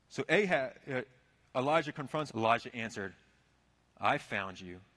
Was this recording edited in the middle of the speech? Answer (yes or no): yes